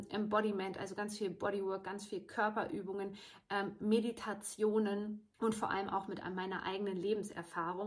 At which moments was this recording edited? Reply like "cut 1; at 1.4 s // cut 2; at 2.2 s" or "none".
cut 1; at 5.3 s